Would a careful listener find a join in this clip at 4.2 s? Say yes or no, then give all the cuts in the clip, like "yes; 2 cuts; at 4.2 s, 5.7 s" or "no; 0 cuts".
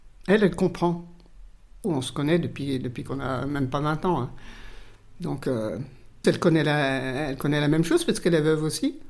no; 2 cuts; at 1.8 s, 6.2 s